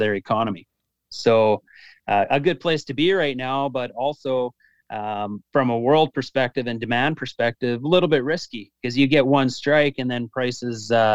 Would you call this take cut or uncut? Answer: uncut